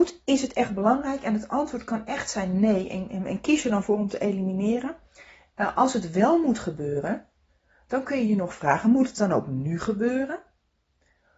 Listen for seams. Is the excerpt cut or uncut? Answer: uncut